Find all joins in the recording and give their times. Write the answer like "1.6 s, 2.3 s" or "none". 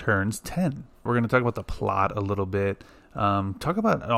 1.1 s

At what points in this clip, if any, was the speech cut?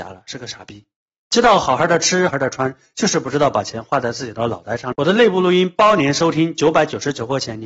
2.3 s, 4.9 s

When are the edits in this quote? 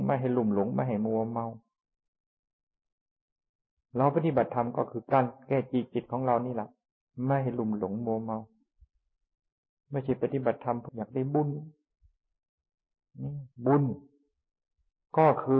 10.9 s, 13.5 s

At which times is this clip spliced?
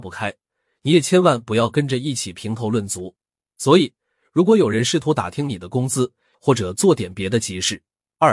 3.4 s, 6.3 s

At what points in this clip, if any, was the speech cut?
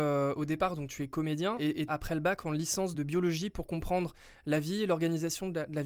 1.9 s, 2.9 s

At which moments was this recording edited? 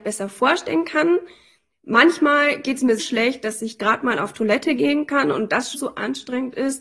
3.0 s, 5.7 s

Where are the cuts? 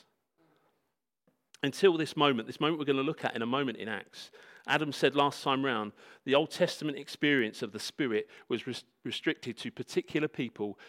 1.5 s

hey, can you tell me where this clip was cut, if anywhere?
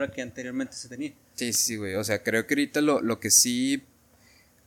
none

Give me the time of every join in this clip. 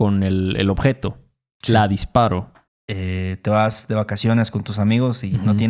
2.7 s

